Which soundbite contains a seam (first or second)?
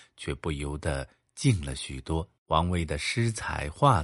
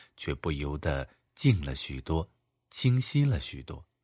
first